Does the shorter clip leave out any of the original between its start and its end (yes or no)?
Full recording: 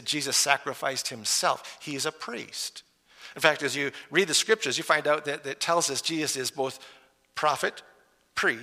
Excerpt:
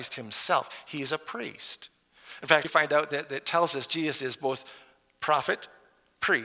yes